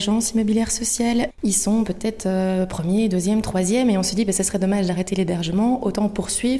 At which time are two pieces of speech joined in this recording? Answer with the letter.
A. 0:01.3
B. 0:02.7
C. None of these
A